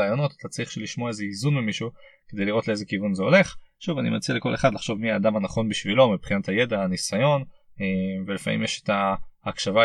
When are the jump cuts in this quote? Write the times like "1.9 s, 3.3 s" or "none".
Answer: none